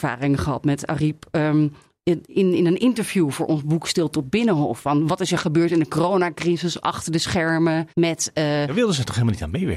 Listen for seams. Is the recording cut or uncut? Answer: cut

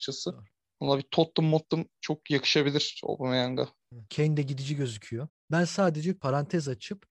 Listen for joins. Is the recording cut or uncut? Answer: cut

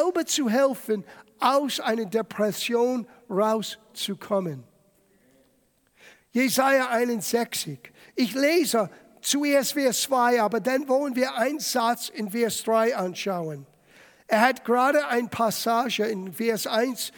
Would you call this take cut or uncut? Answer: uncut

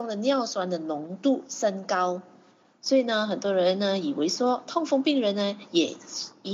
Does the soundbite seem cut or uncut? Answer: cut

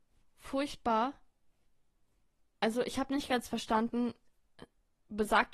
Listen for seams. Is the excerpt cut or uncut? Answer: uncut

